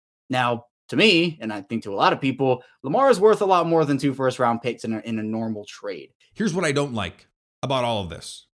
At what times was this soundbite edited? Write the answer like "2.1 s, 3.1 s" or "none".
6.3 s